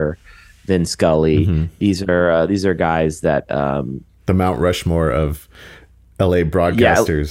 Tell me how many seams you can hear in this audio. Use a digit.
0